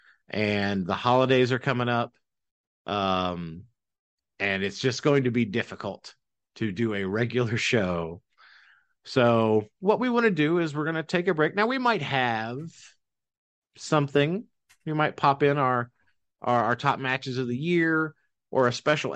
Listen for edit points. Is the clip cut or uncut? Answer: uncut